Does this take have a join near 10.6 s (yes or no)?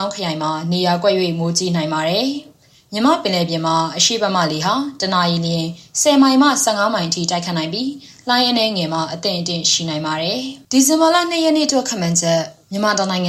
yes